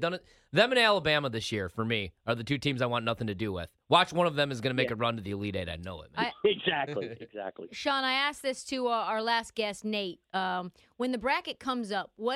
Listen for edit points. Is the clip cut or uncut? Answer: uncut